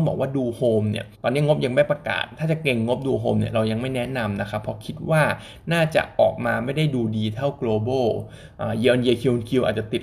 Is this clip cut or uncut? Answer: cut